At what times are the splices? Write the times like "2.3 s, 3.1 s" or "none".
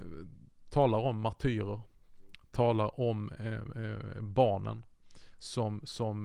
none